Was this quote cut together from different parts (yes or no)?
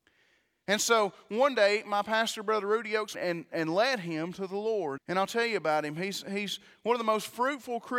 yes